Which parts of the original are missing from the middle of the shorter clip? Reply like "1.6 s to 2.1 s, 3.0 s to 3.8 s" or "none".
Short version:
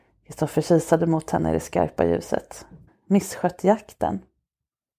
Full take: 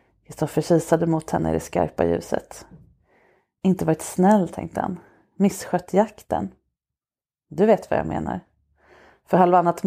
2.9 s to 5.2 s